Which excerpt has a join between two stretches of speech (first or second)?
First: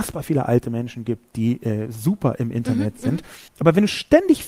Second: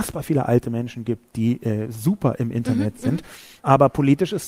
first